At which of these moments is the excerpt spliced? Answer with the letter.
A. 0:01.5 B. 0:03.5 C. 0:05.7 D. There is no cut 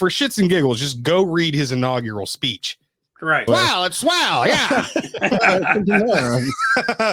B